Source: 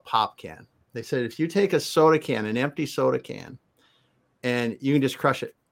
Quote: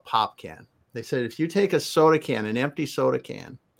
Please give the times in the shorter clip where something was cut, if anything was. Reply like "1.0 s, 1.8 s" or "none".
none